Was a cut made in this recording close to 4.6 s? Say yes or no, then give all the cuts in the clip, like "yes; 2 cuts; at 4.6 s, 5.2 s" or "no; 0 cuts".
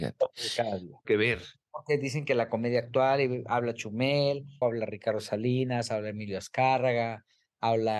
yes; 2 cuts; at 1.0 s, 4.6 s